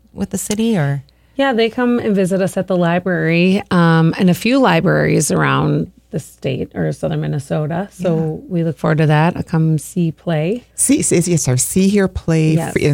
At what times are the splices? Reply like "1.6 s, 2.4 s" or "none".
none